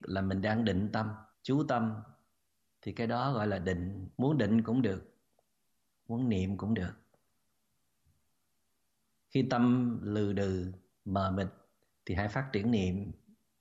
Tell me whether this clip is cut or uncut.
cut